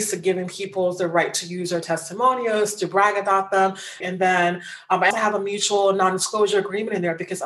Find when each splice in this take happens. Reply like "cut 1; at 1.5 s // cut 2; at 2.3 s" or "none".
cut 1; at 4.0 s // cut 2; at 5.1 s